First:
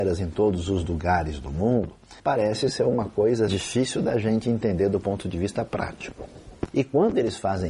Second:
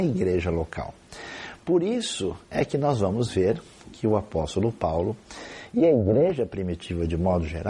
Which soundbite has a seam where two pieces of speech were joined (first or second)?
first